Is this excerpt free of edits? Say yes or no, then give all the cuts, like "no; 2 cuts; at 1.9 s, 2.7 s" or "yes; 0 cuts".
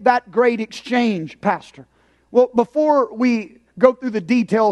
yes; 0 cuts